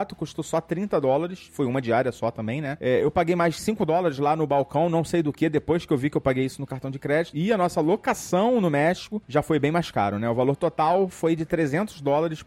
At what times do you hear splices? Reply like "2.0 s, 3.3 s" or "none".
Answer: none